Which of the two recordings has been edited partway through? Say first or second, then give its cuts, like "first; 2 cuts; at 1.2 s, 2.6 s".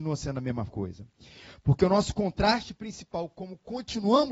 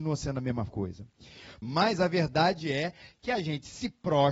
second; 1 cut; at 1.6 s